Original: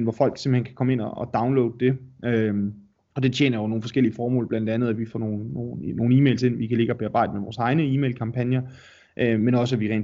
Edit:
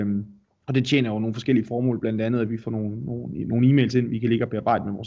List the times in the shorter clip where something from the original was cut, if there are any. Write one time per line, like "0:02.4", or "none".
none

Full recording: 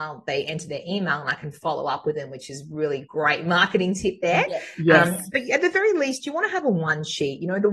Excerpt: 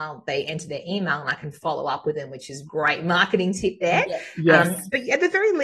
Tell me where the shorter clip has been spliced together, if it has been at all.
0:02.7

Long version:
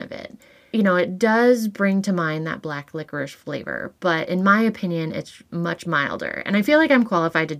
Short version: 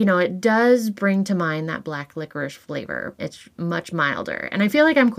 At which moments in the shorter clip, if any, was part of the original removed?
0:03.2

